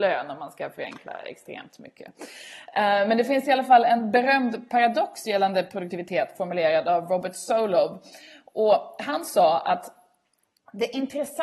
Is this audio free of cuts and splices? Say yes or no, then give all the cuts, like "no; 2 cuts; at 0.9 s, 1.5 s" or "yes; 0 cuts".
yes; 0 cuts